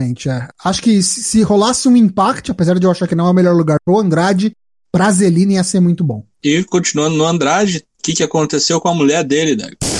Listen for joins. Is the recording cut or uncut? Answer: uncut